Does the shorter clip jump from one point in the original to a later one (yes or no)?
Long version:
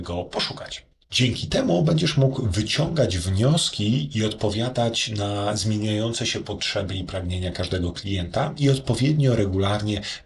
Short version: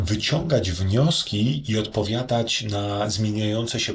no